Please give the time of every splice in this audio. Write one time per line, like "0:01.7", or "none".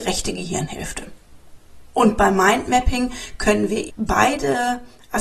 0:03.9

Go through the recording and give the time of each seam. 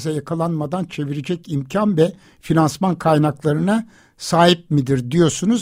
none

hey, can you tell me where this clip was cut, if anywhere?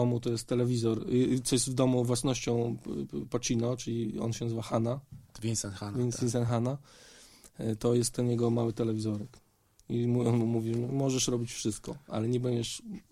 none

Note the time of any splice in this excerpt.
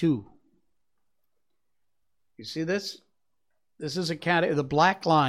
none

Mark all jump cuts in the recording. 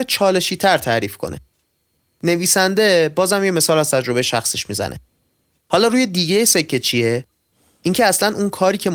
0:05.6

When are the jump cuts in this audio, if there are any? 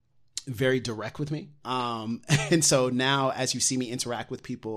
0:01.6

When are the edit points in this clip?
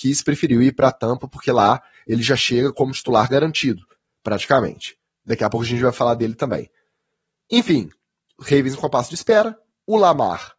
none

